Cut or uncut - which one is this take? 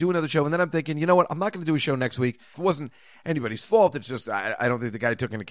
cut